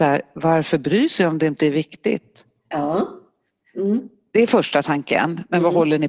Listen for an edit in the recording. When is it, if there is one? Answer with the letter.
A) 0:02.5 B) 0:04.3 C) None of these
C